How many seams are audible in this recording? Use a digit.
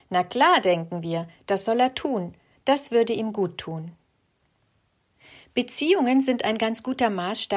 0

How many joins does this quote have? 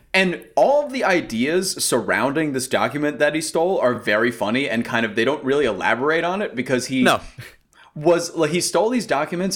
0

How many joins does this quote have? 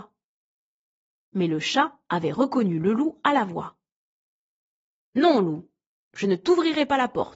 0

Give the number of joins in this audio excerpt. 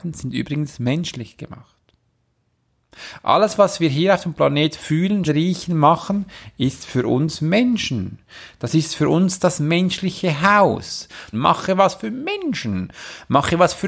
2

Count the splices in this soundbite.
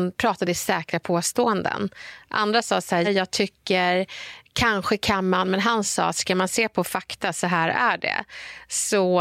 1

